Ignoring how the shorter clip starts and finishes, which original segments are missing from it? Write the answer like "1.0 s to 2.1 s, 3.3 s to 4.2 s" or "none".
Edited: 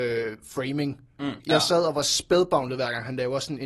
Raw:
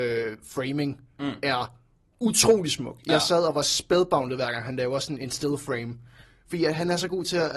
1.4 s to 3.0 s